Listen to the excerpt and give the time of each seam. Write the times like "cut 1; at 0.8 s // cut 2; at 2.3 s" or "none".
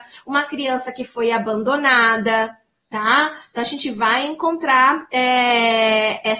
none